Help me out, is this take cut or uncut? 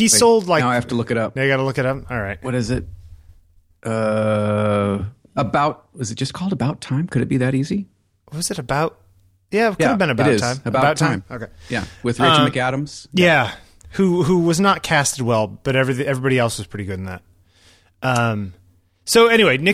uncut